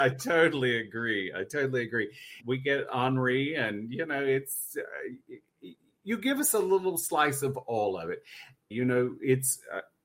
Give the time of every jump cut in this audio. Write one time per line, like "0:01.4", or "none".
0:02.4
0:08.7